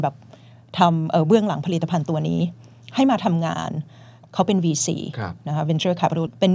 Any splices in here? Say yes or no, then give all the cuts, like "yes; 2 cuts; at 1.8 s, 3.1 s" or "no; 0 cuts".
no; 0 cuts